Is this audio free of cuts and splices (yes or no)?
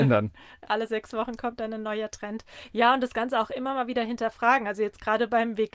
yes